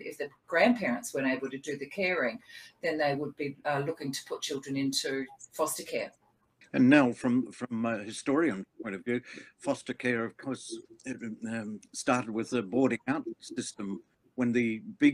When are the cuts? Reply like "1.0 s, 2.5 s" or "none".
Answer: 6.6 s, 10.8 s